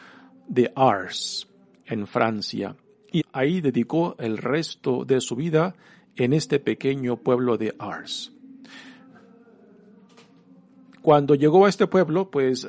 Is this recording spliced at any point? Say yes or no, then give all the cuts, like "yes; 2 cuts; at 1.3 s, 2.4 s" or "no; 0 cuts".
yes; 1 cut; at 3.2 s